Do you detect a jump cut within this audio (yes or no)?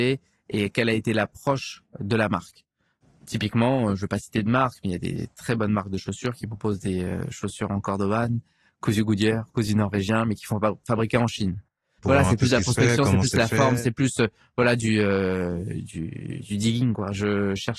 yes